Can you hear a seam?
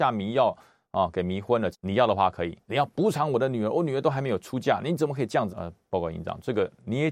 yes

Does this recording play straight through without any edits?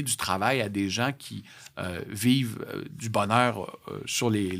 yes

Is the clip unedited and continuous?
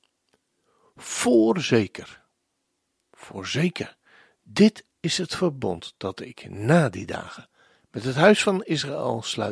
yes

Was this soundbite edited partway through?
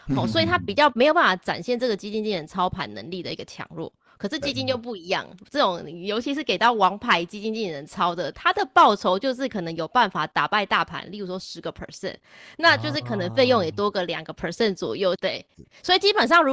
yes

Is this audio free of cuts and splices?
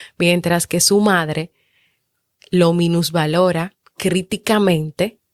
yes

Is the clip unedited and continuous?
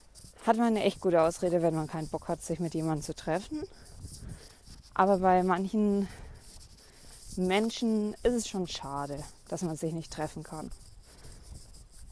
yes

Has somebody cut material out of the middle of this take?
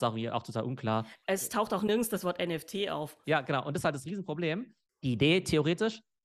yes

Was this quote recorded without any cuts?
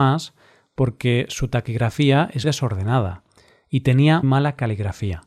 no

